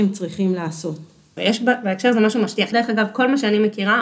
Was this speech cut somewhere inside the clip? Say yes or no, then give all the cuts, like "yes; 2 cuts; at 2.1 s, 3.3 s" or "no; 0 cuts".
yes; 2 cuts; at 1.4 s, 2.7 s